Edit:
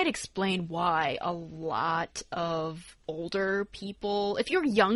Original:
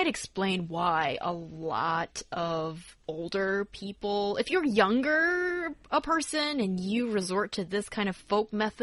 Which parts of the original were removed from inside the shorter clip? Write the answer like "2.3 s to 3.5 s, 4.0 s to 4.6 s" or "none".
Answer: none